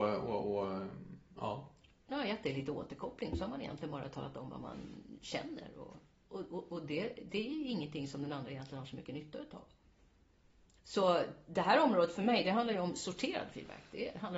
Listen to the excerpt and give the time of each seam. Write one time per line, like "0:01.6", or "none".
0:02.1